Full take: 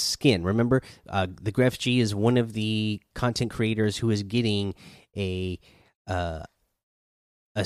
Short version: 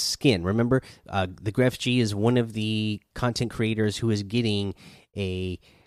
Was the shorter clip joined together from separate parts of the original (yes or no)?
no